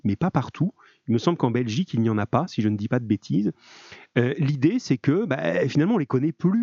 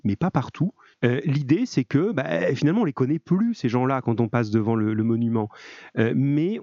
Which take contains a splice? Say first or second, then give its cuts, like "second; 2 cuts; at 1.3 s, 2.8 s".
second; 1 cut; at 0.9 s